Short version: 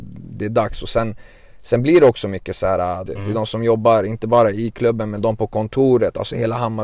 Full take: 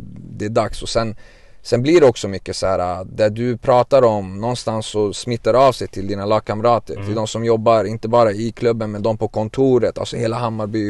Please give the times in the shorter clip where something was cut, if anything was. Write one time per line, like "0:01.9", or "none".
0:03.1